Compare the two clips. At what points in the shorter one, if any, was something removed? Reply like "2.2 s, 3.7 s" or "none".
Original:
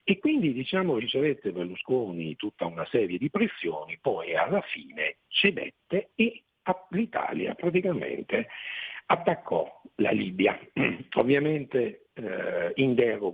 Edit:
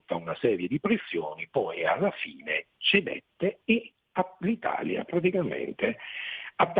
none